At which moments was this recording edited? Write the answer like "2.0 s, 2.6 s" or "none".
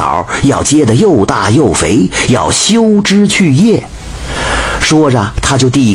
none